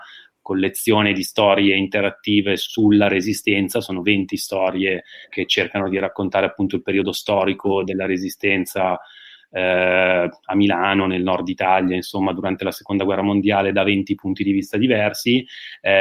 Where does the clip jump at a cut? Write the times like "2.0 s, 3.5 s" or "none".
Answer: 5.3 s

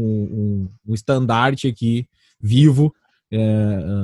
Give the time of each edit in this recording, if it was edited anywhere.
none

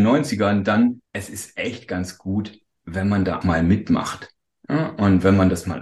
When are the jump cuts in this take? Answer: 1.1 s, 3.4 s

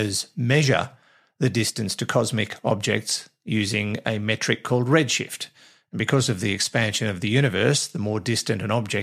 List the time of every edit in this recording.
none

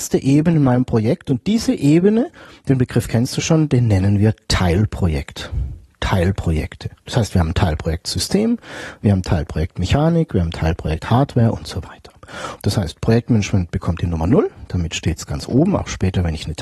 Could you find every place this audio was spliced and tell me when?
12.6 s

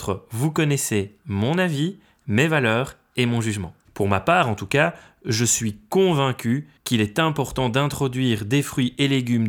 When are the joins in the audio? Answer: 3.8 s, 6.8 s

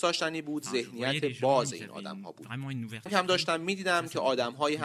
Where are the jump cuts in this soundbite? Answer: 3.1 s

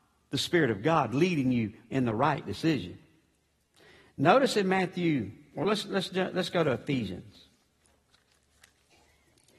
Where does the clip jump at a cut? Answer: none

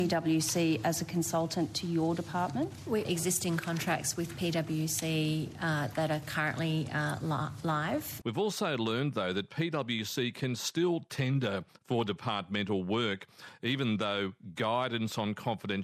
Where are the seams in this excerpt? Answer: 3.0 s, 8.2 s

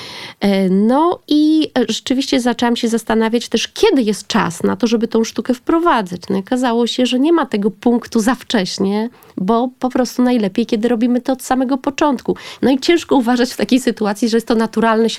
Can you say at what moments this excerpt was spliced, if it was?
12.6 s

